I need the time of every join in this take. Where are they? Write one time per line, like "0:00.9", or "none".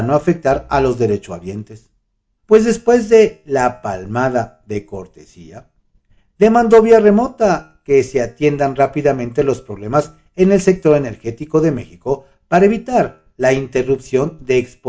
0:02.4